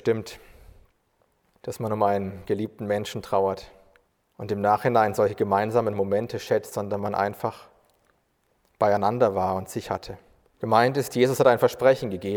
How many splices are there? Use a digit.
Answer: 2